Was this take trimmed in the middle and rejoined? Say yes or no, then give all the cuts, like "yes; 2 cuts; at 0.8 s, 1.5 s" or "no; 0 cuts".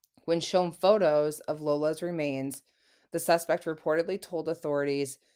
no; 0 cuts